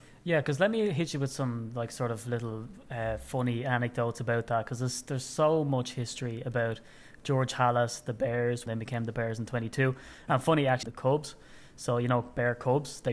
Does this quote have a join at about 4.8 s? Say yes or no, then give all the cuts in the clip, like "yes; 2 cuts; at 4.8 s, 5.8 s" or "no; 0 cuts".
no; 2 cuts; at 8.7 s, 10.8 s